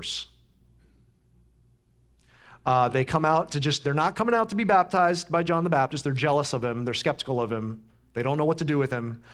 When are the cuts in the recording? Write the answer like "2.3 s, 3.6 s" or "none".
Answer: none